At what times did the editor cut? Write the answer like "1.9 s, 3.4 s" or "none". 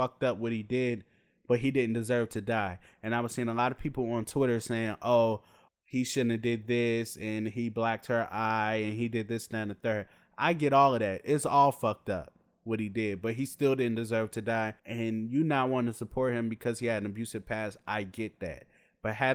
5.7 s, 14.8 s